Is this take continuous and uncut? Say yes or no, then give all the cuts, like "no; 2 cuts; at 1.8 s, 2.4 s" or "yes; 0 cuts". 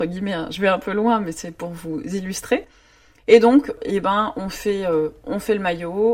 no; 1 cut; at 3.2 s